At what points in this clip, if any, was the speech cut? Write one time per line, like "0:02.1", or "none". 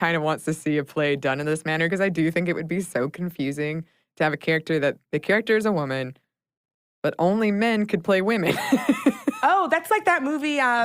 0:06.9